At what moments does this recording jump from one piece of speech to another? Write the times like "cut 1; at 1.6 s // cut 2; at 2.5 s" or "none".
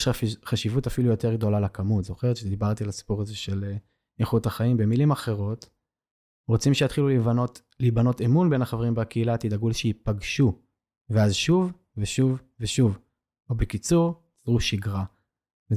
cut 1; at 11.9 s